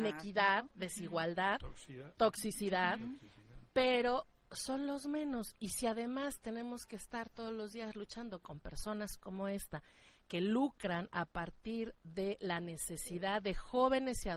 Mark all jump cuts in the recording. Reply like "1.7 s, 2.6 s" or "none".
2.2 s